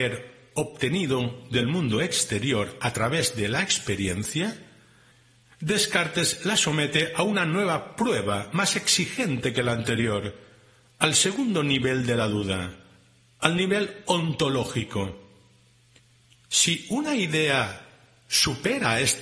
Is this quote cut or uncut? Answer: cut